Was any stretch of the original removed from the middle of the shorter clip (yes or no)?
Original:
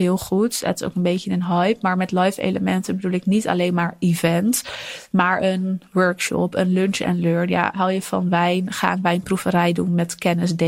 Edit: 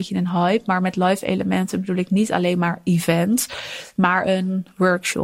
no